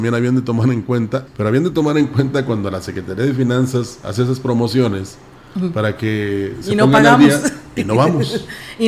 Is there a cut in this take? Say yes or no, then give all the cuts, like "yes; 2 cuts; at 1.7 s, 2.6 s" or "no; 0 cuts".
yes; 1 cut; at 1.3 s